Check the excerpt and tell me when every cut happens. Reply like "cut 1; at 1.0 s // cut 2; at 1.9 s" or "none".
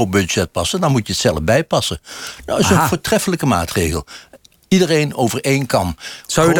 none

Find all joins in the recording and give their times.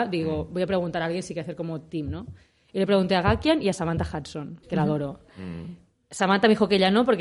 cut 1; at 4.6 s

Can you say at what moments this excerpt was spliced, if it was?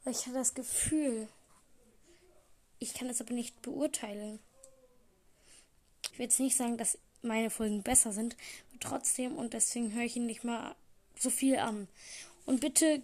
cut 1; at 6.1 s

